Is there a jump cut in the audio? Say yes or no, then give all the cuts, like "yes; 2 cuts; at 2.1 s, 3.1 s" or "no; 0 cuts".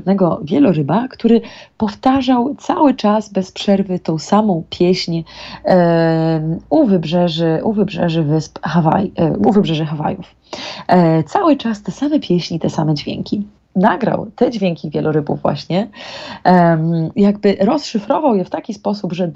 yes; 2 cuts; at 13.6 s, 17.1 s